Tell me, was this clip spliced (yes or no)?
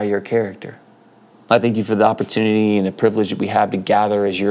yes